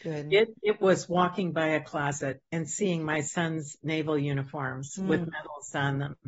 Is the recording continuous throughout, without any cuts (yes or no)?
yes